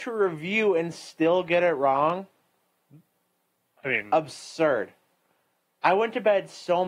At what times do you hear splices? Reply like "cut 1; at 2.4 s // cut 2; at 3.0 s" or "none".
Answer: none